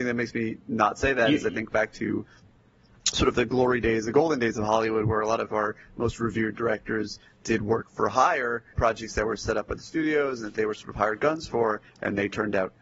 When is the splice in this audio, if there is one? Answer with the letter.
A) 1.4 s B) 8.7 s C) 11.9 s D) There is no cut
B